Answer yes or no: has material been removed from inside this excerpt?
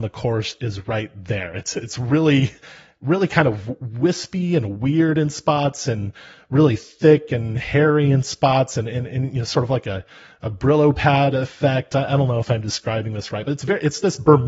no